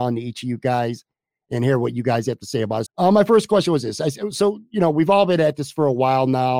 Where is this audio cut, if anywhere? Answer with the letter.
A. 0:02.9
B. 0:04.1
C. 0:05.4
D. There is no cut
A